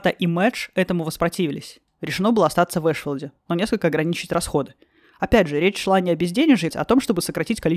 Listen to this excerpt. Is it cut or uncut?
cut